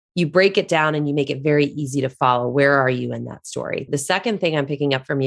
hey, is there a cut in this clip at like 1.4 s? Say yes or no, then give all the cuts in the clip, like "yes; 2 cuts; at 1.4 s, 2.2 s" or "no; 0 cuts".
no; 1 cut; at 3.9 s